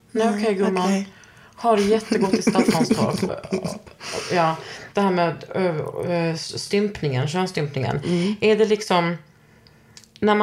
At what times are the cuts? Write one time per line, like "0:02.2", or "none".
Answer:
0:03.3
0:04.9